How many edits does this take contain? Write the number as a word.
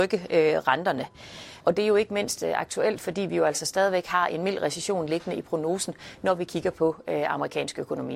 one